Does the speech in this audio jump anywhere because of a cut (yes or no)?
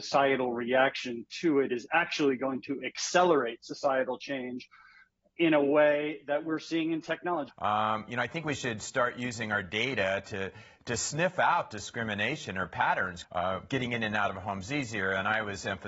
yes